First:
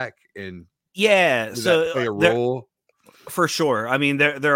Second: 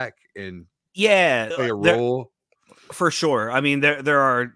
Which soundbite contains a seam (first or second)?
second